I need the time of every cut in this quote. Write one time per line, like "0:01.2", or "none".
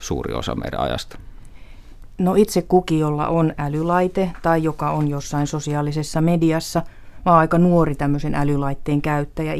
none